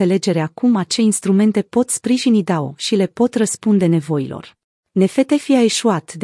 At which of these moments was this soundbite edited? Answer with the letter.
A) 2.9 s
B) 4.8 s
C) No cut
B